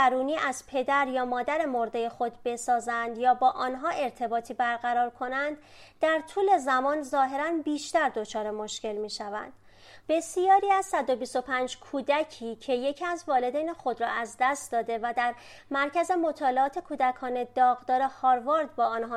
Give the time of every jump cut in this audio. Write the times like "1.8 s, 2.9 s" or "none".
10.0 s